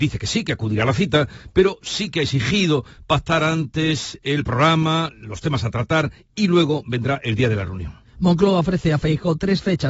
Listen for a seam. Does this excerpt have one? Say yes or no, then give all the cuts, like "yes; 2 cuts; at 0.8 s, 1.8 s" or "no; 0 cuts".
no; 0 cuts